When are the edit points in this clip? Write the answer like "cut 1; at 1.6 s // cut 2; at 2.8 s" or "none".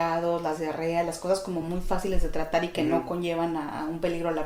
none